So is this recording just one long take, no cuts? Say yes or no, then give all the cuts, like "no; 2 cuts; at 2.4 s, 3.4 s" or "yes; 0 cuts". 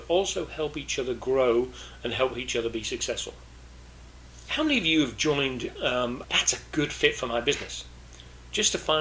no; 1 cut; at 6.2 s